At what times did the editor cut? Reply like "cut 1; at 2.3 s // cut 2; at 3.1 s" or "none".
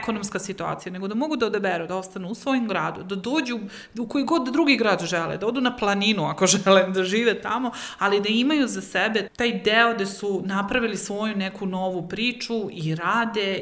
cut 1; at 9.3 s